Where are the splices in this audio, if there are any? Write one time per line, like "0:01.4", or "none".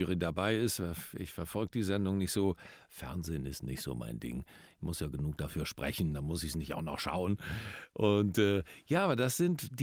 none